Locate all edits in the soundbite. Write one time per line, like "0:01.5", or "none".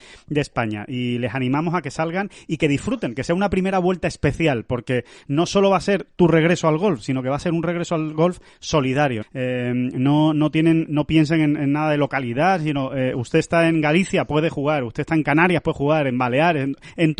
0:09.2
0:10.9